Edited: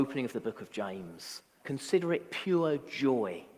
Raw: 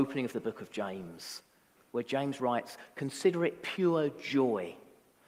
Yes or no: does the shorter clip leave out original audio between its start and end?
yes